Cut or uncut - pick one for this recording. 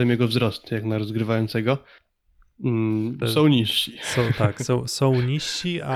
cut